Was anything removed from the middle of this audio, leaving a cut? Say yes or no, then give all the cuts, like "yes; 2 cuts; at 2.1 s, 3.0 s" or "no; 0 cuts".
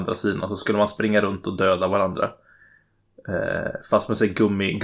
no; 0 cuts